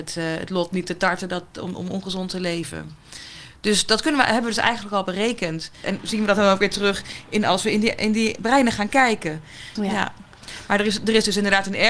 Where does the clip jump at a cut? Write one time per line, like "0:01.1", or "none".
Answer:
0:05.8
0:09.8